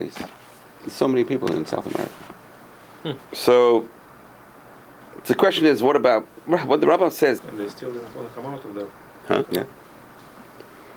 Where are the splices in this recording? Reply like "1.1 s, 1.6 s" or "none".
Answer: 3.2 s, 7.4 s, 9.4 s